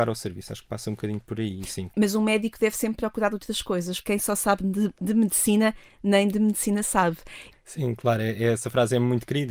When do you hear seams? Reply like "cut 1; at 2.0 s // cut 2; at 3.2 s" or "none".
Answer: cut 1; at 4.0 s // cut 2; at 7.5 s